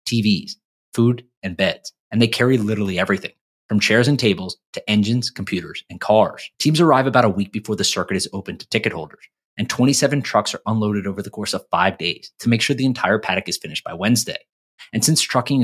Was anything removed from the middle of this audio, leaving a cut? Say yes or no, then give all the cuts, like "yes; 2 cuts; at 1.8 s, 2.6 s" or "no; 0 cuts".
yes; 1 cut; at 6.5 s